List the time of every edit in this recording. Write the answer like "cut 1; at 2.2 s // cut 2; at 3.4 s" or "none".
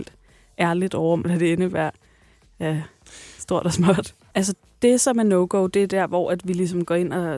cut 1; at 1.2 s // cut 2; at 4.3 s